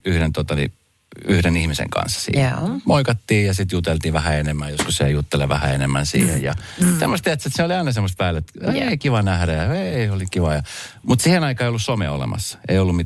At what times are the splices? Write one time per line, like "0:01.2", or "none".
none